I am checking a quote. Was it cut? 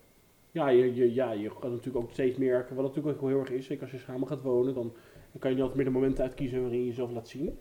no; 0 cuts

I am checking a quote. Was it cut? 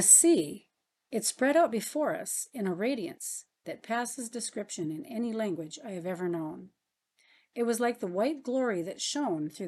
no; 0 cuts

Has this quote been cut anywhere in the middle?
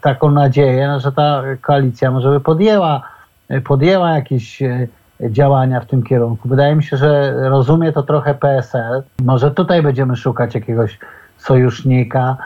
no; 0 cuts

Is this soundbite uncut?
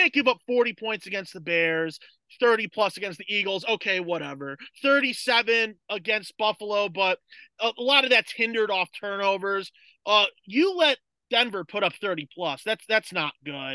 yes; 0 cuts

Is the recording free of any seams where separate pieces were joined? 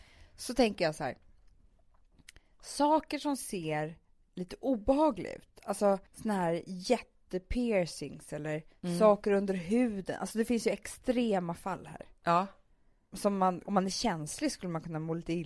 no; 1 cut; at 6.1 s

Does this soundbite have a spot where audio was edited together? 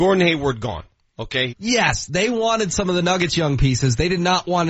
yes; 1 cut; at 1.5 s

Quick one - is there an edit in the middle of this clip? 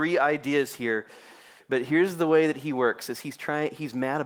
yes; 1 cut; at 1.6 s

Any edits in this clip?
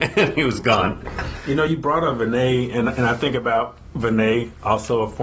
no; 0 cuts

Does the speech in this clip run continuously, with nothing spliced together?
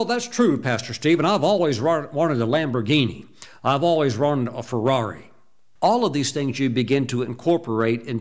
no; 1 cut; at 5.8 s

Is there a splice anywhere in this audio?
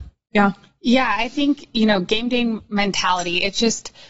no; 0 cuts

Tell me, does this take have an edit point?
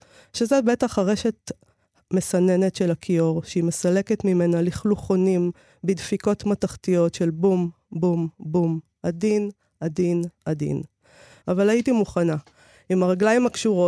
yes; 1 cut; at 11.4 s

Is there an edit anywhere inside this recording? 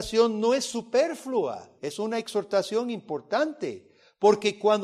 yes; 1 cut; at 1.8 s

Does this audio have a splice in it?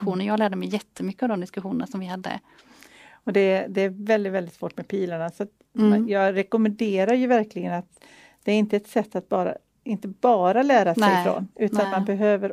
no; 0 cuts

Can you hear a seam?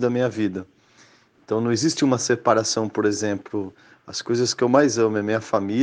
no; 0 cuts

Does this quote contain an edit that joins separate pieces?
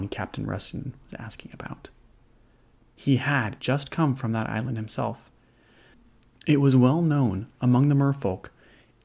yes; 1 cut; at 3.6 s

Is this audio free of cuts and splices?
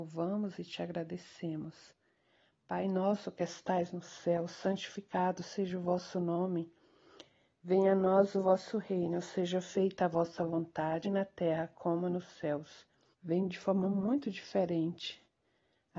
no; 2 cuts; at 11.0 s, 13.1 s

